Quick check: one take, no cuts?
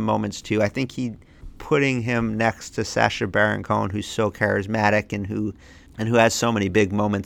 yes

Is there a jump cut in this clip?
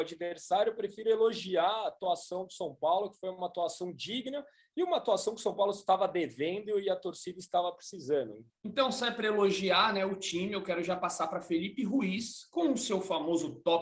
yes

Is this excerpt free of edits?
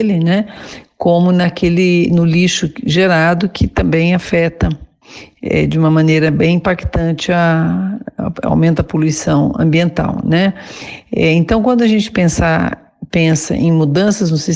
yes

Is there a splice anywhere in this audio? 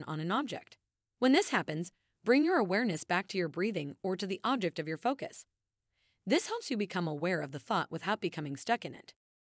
yes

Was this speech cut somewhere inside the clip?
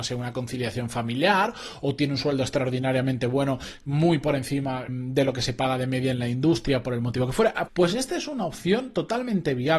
yes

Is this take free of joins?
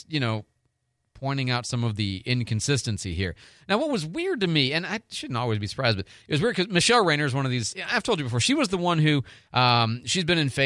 yes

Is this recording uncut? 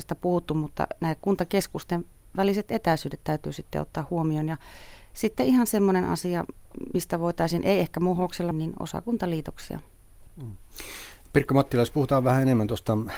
no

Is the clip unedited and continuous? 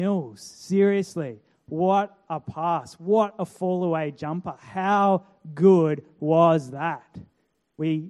yes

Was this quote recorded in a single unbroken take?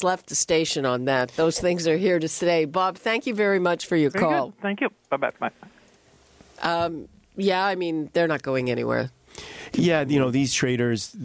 yes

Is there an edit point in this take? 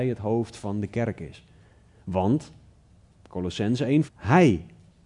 yes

